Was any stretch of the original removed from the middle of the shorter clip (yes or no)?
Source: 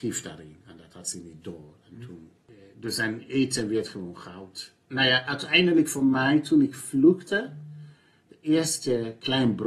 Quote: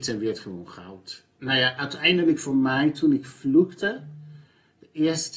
no